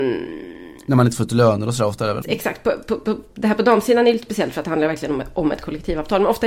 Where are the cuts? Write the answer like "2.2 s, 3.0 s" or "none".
2.2 s